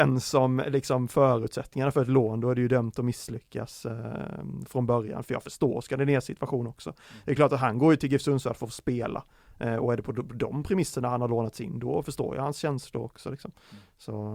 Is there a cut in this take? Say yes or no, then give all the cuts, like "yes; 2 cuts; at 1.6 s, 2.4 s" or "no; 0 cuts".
no; 0 cuts